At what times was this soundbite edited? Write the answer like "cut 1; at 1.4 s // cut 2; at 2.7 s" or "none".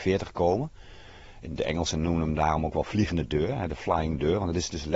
none